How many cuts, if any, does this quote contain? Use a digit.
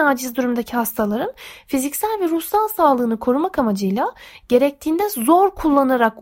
0